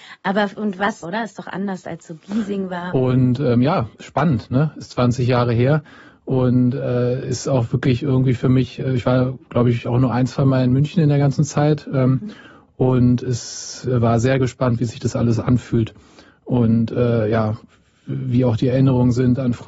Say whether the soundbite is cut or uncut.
cut